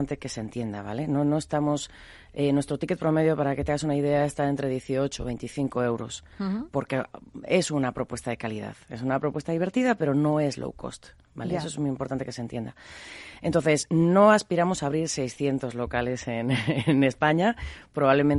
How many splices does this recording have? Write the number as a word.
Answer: zero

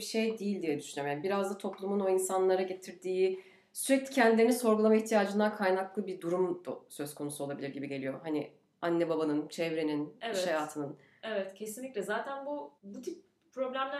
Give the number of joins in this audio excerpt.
one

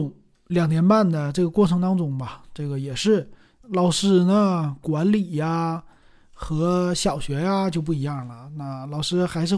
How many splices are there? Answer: one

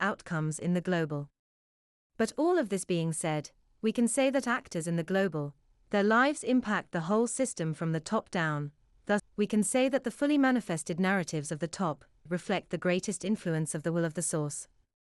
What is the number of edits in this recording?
two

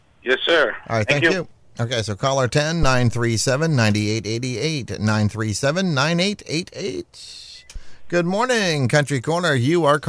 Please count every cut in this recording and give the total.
zero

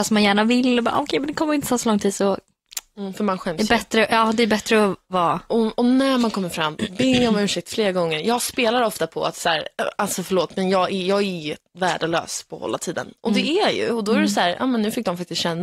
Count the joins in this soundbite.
zero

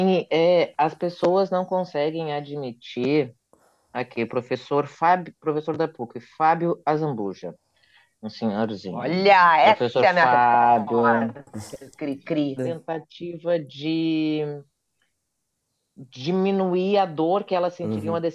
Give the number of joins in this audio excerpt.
one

